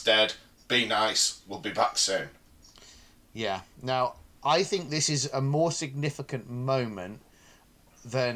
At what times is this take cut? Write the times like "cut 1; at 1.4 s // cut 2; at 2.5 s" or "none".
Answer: cut 1; at 4.4 s